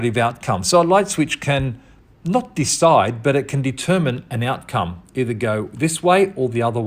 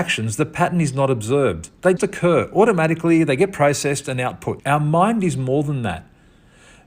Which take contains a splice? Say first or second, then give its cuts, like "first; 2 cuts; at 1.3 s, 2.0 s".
second; 2 cuts; at 2.0 s, 4.6 s